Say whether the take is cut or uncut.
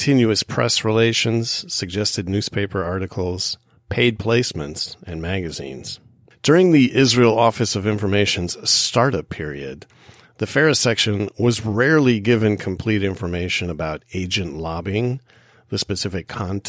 uncut